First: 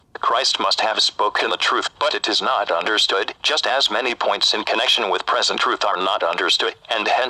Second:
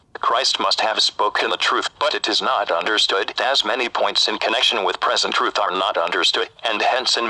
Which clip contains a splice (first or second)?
second